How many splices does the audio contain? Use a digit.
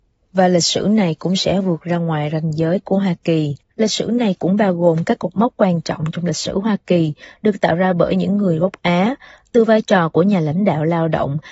1